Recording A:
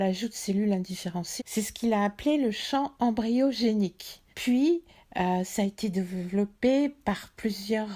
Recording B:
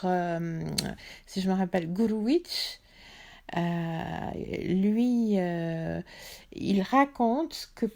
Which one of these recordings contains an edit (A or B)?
A